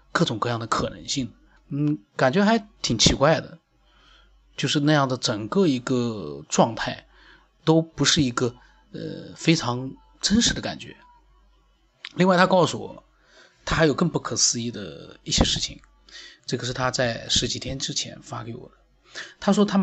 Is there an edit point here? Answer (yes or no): yes